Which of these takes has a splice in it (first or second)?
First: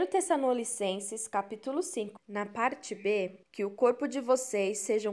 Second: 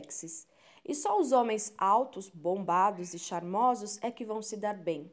first